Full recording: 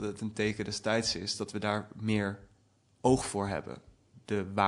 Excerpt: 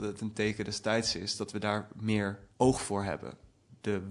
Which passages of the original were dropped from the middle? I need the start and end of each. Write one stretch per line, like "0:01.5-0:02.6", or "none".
0:02.5-0:03.0